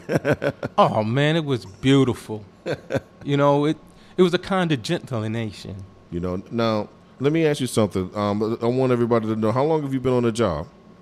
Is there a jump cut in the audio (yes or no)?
yes